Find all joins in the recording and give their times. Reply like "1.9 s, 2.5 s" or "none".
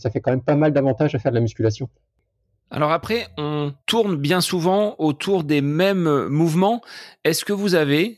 3.8 s

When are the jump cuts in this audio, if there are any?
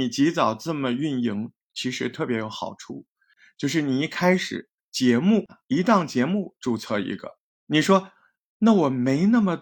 4.8 s, 7.5 s

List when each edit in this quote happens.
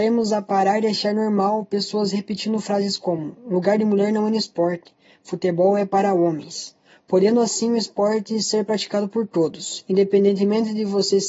none

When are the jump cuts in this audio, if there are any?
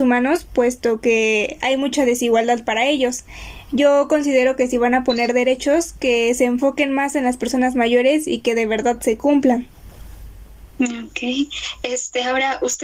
10.7 s

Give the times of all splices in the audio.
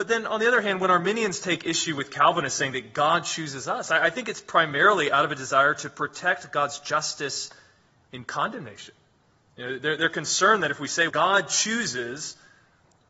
11.1 s

